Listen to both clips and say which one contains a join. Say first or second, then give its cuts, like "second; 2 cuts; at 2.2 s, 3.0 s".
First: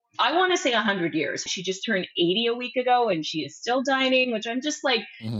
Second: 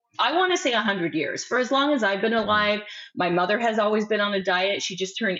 first; 1 cut; at 1.5 s